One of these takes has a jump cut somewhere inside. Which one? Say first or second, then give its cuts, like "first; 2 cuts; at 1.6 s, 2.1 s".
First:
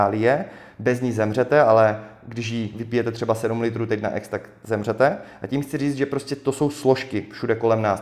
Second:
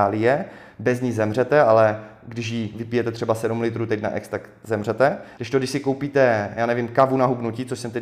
second; 1 cut; at 5.3 s